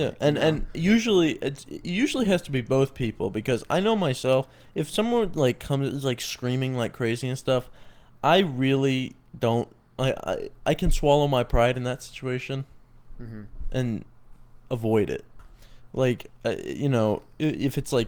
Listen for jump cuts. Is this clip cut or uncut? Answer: uncut